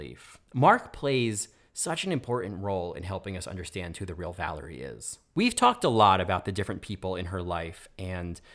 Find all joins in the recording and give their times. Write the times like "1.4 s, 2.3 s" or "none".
none